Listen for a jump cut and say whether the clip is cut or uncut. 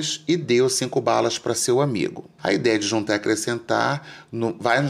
cut